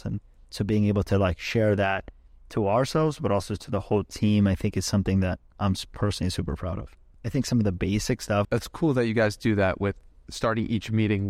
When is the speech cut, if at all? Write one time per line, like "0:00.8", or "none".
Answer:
0:07.1
0:08.4